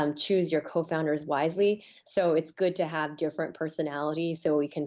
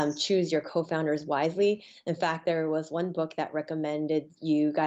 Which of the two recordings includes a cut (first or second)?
first